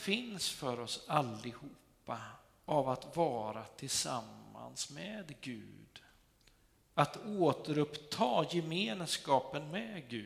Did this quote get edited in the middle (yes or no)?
no